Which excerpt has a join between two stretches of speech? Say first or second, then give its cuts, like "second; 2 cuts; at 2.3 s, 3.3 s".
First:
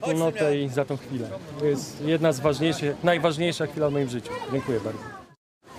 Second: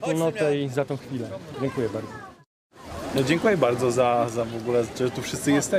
second; 1 cut; at 1.5 s